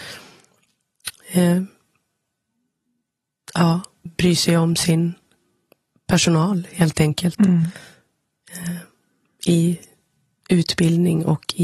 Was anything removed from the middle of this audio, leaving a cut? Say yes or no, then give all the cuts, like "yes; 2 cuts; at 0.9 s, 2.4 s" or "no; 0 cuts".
yes; 1 cut; at 4.1 s